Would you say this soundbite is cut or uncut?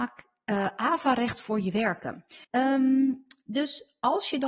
cut